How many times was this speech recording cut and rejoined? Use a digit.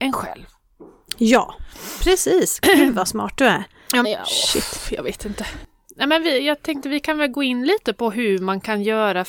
1